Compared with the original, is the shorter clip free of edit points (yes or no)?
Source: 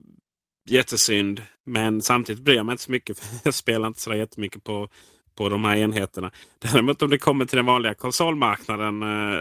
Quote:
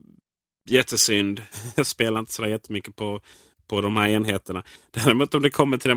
no